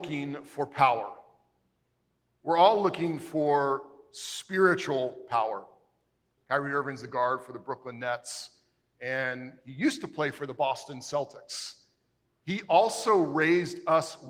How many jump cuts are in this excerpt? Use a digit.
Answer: 2